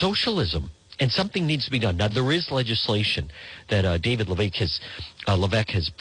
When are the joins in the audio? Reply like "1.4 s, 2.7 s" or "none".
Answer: none